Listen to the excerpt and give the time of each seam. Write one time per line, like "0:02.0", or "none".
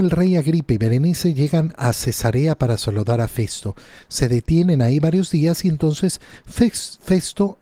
none